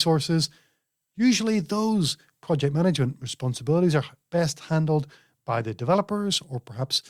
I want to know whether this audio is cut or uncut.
uncut